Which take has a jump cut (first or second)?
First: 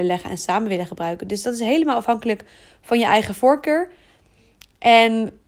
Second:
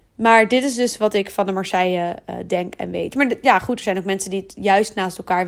second